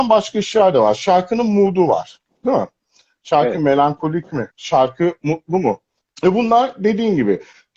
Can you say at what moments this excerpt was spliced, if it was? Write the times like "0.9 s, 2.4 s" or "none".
4.5 s, 6.0 s